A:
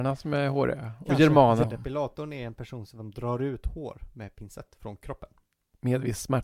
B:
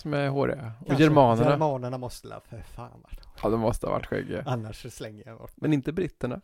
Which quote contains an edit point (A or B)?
A